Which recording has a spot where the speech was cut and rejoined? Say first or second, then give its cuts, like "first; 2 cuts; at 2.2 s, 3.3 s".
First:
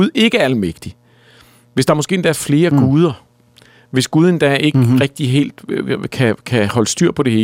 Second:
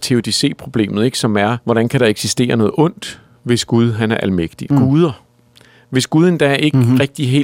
second; 2 cuts; at 1.6 s, 4.7 s